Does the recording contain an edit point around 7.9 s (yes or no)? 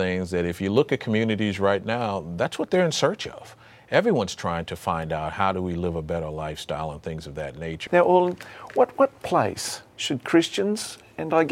yes